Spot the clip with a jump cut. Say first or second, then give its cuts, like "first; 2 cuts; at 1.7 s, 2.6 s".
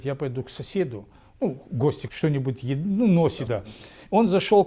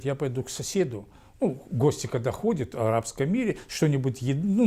first; 2 cuts; at 2.1 s, 3.5 s